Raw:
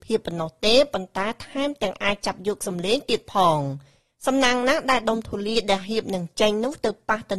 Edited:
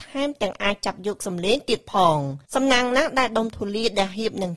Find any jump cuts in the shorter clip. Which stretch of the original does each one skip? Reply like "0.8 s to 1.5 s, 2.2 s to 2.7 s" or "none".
3.9 s to 4.2 s